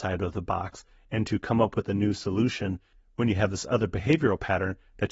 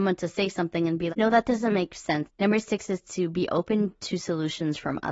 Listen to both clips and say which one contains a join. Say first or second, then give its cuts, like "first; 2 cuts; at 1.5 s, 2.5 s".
second; 2 cuts; at 1.1 s, 2.3 s